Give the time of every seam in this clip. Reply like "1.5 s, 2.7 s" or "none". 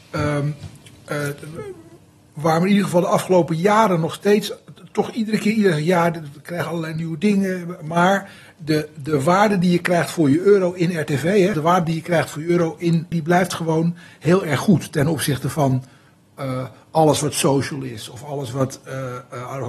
11.5 s, 13.1 s

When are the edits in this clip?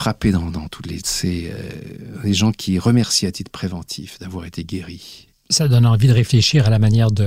1.0 s, 5.3 s

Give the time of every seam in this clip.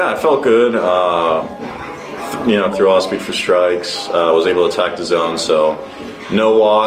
2.7 s

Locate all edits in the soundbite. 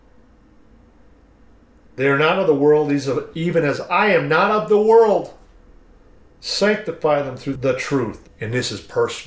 8.2 s

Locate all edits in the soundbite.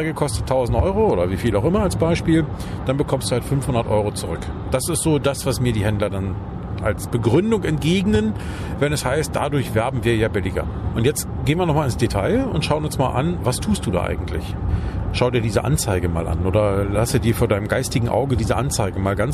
10.9 s

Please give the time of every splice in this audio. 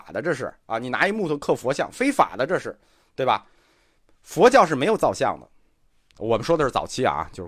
none

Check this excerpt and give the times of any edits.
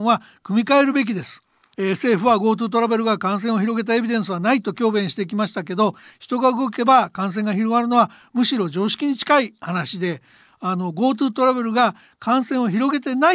1.7 s

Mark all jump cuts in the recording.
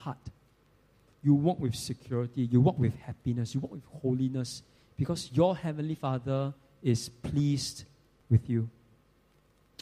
1.1 s

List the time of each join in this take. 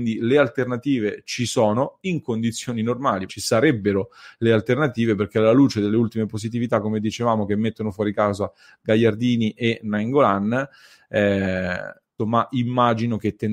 3.3 s, 12.2 s

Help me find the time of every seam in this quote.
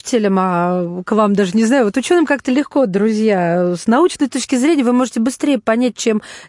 none

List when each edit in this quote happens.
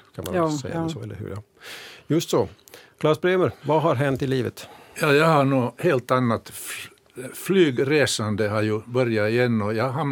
3.6 s

